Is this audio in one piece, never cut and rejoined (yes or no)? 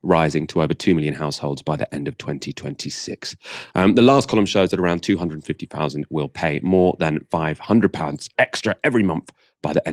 yes